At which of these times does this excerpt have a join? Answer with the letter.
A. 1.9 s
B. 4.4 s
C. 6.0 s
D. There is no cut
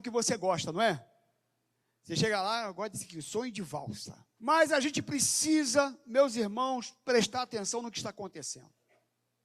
B